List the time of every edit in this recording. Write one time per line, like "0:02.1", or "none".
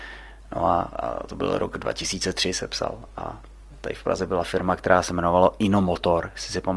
none